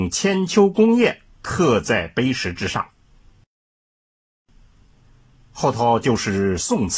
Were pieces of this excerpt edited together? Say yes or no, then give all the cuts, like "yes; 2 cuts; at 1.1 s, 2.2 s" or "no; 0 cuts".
no; 0 cuts